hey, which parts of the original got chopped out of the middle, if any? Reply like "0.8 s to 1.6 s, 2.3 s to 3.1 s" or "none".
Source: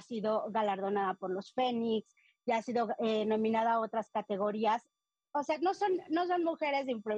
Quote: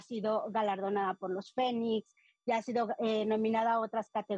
none